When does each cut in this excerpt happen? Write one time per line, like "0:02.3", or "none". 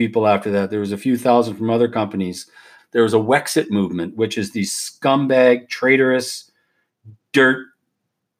0:02.8